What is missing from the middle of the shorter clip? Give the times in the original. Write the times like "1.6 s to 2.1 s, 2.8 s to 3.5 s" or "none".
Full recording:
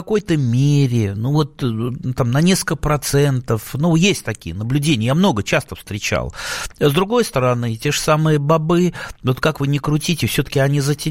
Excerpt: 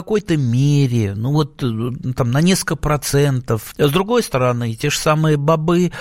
3.7 s to 6.7 s